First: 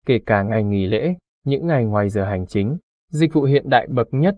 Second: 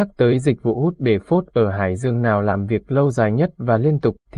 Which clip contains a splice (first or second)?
first